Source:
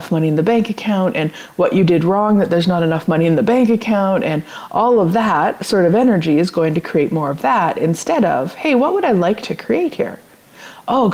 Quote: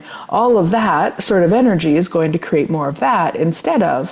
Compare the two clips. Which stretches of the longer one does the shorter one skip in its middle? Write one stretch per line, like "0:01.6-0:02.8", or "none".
none